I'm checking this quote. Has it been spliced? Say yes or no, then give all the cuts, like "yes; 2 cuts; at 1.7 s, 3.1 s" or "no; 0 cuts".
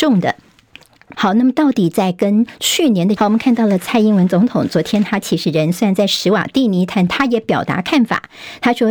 yes; 2 cuts; at 1.1 s, 3.2 s